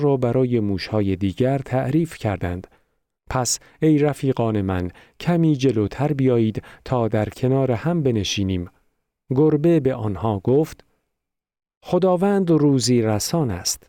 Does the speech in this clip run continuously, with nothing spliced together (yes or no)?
no